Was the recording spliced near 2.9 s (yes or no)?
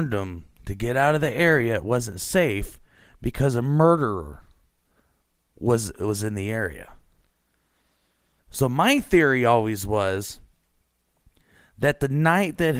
no